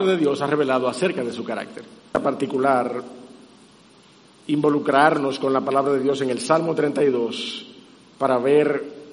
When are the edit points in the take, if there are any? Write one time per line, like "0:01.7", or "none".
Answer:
none